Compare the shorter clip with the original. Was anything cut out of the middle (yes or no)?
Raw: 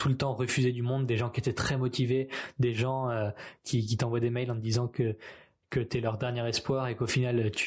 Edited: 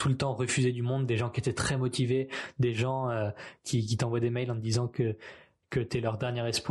no